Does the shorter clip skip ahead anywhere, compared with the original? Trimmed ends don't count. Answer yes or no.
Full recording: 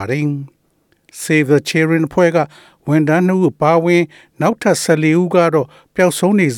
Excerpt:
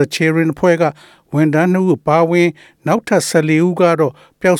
no